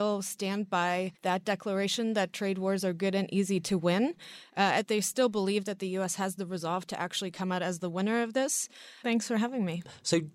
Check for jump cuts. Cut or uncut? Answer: cut